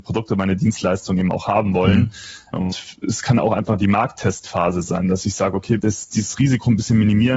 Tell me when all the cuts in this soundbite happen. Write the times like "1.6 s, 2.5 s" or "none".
2.5 s, 5.8 s